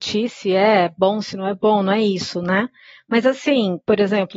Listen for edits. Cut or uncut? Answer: uncut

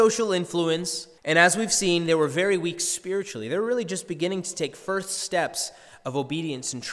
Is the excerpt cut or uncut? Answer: cut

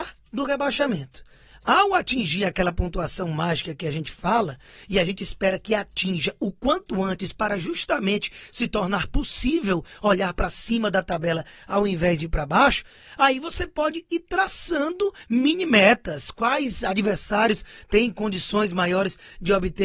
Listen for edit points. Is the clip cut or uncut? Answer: uncut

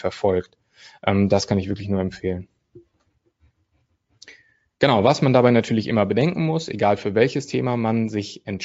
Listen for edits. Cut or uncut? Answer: uncut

